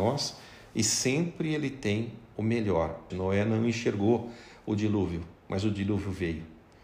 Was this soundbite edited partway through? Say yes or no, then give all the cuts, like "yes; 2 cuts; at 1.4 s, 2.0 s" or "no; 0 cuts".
yes; 1 cut; at 3.1 s